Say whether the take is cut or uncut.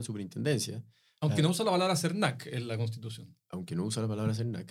uncut